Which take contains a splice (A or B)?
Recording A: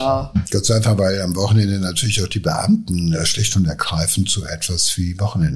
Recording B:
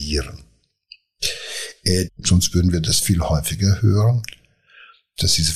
B